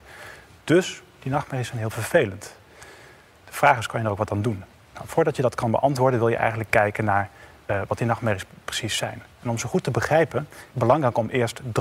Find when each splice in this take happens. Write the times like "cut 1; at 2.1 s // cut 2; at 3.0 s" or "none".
cut 1; at 10.7 s